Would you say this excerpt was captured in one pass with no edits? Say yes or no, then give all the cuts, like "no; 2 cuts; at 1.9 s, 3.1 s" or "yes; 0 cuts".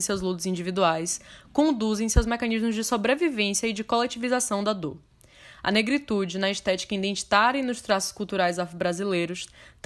yes; 0 cuts